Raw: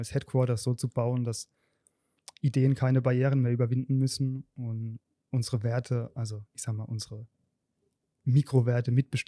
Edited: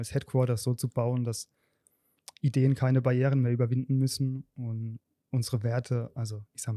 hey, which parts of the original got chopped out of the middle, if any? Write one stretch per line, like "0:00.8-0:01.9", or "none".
none